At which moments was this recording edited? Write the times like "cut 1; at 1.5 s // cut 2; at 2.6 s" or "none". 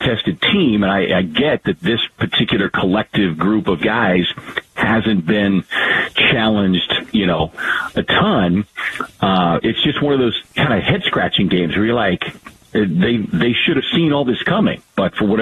none